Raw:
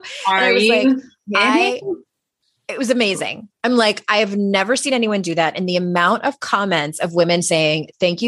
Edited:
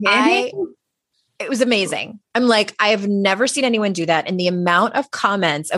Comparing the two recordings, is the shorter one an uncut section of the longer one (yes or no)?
yes